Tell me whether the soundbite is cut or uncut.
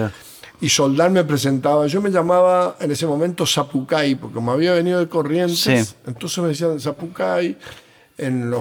uncut